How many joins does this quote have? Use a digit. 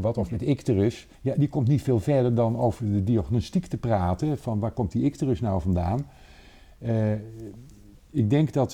1